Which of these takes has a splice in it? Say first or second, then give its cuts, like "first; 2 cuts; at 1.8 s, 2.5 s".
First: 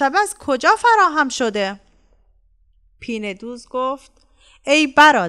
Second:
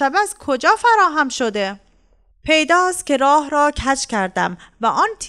second; 1 cut; at 2.3 s